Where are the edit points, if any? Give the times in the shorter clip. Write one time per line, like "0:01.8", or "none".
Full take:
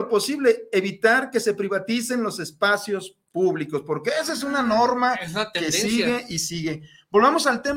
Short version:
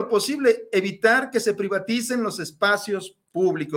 none